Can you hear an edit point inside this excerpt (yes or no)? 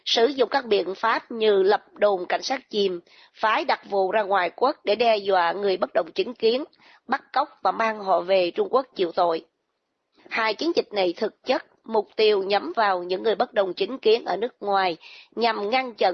yes